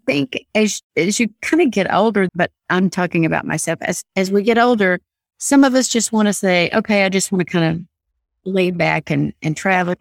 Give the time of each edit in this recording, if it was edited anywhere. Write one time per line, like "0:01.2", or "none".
0:02.3

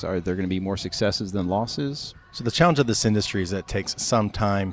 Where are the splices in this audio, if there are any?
0:02.1

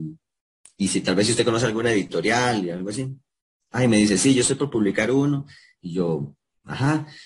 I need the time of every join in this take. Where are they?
0:05.7

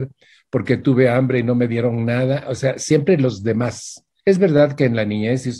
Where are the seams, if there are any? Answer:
0:04.2

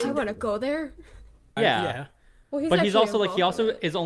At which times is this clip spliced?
0:01.6

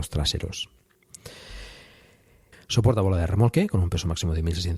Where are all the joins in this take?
0:02.5

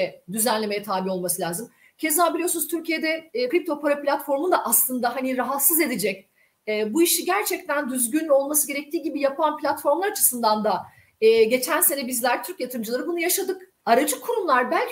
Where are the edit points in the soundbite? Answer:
0:03.5
0:13.8

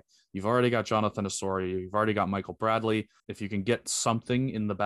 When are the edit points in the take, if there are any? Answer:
0:03.2

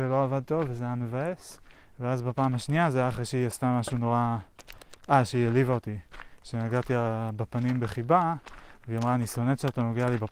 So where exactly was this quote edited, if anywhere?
none

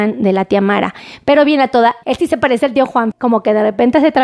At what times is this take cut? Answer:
0:02.0
0:03.1

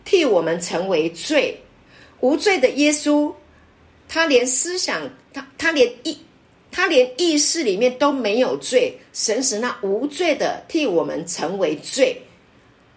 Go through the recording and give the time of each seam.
none

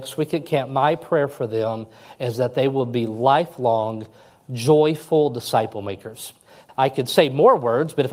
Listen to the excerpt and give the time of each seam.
0:06.7

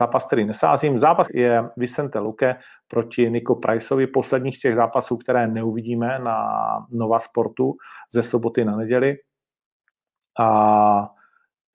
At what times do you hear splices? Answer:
0:01.3

